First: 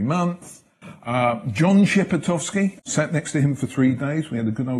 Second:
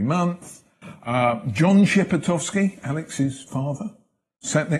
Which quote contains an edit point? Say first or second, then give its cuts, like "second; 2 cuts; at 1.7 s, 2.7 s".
first; 1 cut; at 2.8 s